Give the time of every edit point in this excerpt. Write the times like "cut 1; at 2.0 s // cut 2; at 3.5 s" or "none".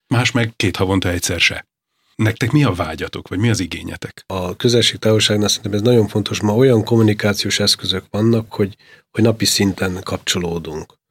none